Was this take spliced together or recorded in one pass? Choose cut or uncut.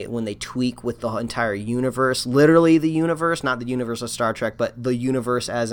uncut